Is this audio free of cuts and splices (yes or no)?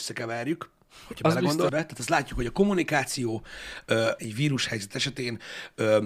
no